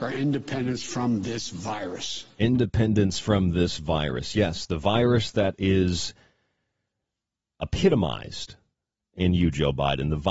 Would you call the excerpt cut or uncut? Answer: uncut